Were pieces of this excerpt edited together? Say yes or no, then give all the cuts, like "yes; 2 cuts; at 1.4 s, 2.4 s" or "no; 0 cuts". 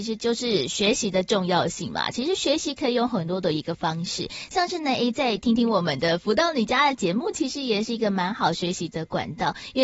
no; 0 cuts